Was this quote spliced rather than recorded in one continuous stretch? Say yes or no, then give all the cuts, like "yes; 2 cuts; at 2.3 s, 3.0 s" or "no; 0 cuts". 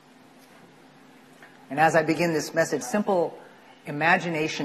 yes; 1 cut; at 2.8 s